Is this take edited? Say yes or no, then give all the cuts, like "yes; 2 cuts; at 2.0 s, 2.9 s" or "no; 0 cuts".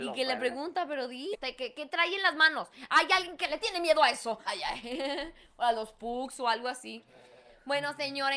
yes; 2 cuts; at 1.3 s, 4.5 s